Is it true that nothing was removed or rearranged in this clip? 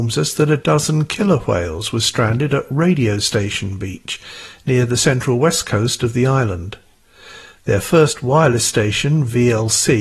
yes; 0 cuts

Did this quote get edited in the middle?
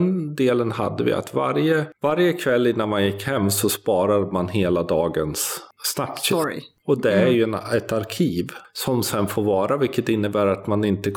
no; 0 cuts

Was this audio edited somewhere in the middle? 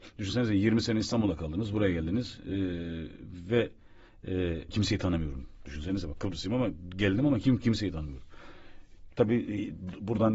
yes; 2 cuts; at 4.7 s, 9.1 s

